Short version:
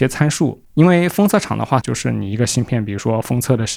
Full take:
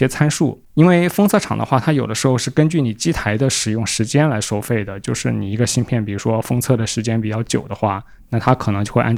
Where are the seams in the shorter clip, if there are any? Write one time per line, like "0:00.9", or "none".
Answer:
0:01.8